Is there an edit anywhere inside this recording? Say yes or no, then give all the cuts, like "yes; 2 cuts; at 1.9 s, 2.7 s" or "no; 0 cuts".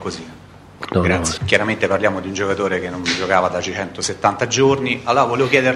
yes; 1 cut; at 1.4 s